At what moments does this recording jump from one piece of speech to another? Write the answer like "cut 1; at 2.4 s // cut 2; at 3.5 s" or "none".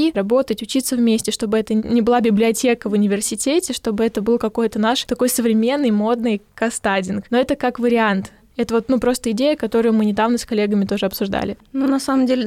none